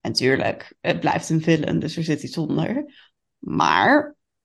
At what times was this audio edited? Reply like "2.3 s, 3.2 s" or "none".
none